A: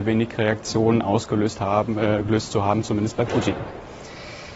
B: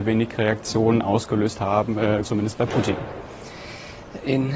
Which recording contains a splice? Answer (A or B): B